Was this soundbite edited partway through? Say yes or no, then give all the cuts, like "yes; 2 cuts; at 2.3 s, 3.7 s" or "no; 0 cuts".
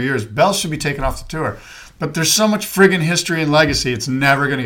no; 0 cuts